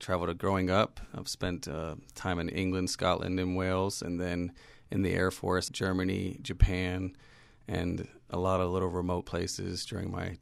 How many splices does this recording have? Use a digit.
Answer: 1